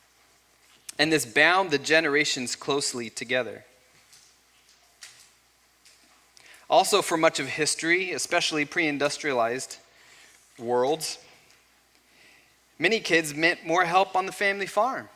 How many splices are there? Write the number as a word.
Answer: zero